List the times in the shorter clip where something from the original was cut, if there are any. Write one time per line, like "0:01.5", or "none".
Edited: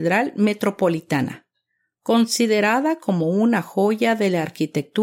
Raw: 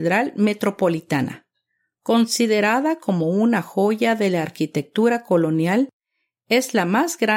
none